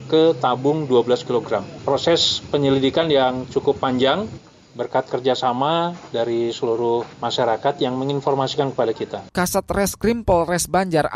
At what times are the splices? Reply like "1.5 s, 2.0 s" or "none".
7.1 s, 9.3 s